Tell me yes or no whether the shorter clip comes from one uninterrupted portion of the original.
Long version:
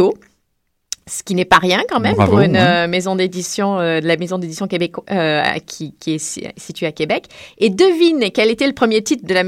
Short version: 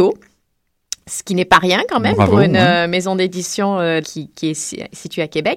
no